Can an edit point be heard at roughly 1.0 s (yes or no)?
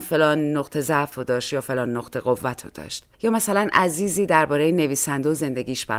no